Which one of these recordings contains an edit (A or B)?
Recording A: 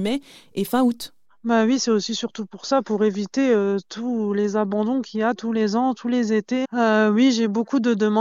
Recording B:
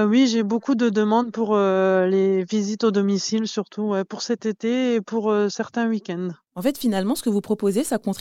A